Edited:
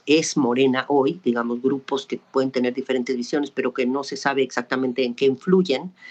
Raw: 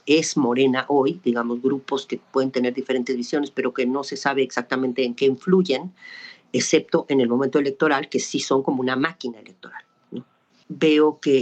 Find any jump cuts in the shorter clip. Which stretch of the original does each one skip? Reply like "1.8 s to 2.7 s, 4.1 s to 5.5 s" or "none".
none